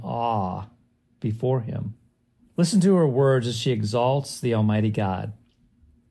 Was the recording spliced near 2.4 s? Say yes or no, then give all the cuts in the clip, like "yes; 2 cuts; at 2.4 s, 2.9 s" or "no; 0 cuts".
yes; 1 cut; at 2.4 s